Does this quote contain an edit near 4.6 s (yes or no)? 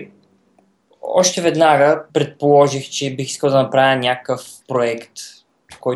yes